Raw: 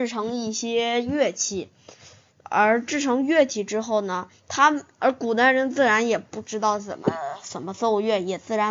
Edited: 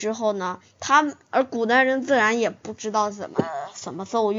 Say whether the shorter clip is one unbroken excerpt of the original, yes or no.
yes